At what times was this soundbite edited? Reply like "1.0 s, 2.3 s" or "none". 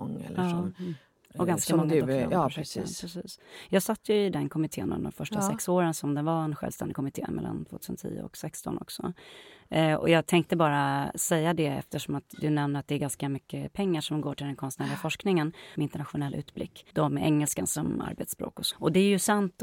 15.7 s, 16.9 s, 18.7 s

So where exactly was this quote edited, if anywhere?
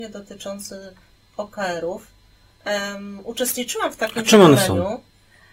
2.5 s

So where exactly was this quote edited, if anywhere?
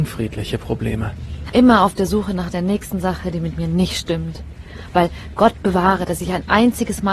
1.5 s

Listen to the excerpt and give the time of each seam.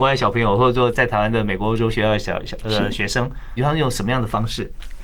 0.9 s, 3.6 s

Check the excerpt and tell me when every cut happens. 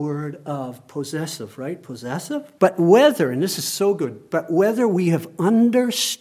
2.6 s

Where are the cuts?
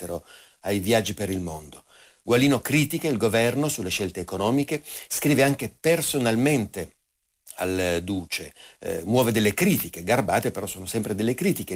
2.2 s

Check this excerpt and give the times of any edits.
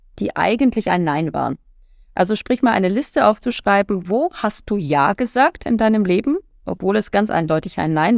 none

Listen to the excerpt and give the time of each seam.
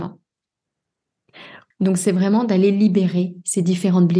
1.7 s

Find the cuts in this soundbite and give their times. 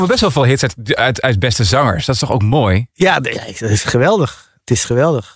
none

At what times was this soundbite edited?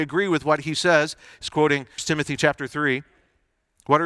2.0 s

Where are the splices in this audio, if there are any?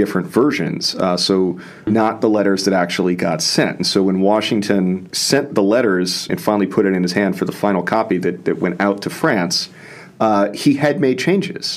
1.9 s, 5.1 s, 6.3 s

